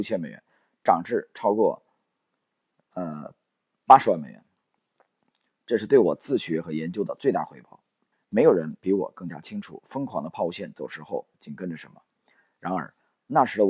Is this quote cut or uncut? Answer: cut